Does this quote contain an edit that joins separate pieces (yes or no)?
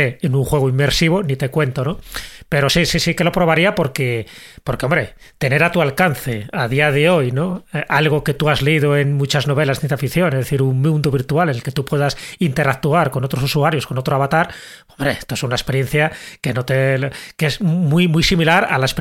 no